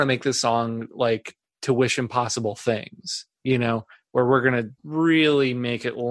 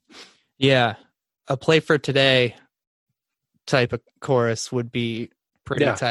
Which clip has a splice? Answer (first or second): first